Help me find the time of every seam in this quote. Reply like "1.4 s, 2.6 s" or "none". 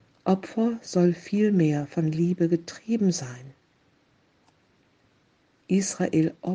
none